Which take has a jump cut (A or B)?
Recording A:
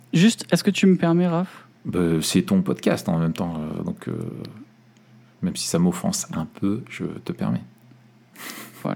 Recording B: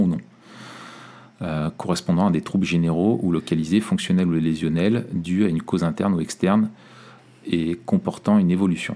A